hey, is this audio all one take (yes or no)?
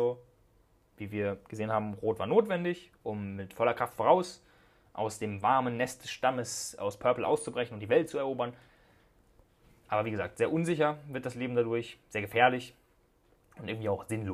yes